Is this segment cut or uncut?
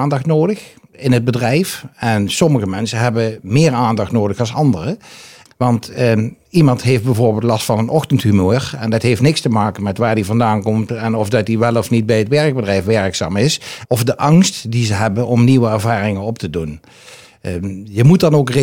cut